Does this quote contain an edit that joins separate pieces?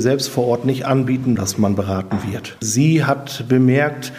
yes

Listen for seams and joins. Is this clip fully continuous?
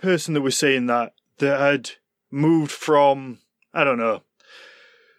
yes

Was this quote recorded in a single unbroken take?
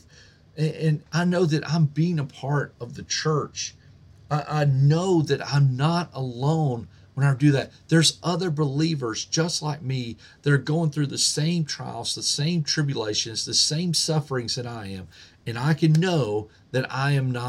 no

